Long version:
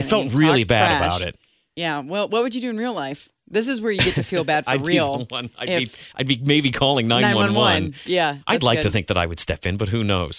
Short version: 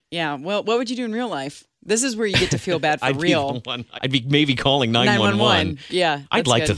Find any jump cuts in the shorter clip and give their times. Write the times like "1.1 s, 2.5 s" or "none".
4.0 s